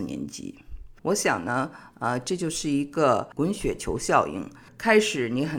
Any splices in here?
yes; 1 cut; at 1.0 s

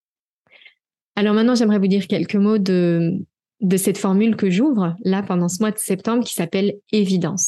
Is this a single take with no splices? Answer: yes; 0 cuts

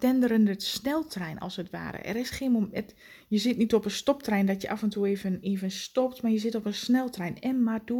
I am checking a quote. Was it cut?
no; 0 cuts

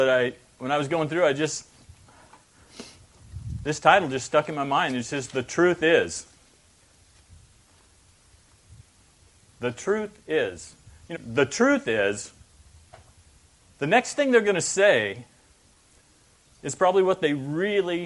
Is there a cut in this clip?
yes; 1 cut; at 11.1 s

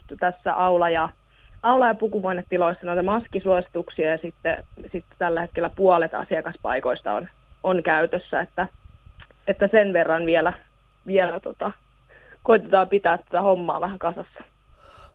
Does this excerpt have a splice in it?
no; 0 cuts

